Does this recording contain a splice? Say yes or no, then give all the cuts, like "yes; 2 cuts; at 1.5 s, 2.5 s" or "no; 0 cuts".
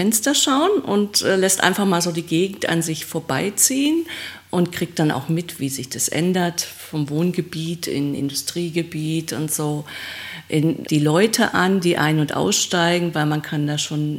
yes; 1 cut; at 10.8 s